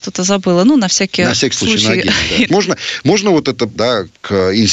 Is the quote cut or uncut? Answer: cut